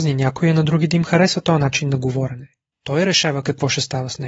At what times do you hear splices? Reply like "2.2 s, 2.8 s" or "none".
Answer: 2.7 s